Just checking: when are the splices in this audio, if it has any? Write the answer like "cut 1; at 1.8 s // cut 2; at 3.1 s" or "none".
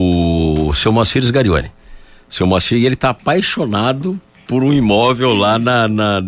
none